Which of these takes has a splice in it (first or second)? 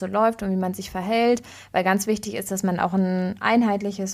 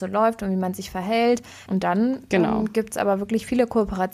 second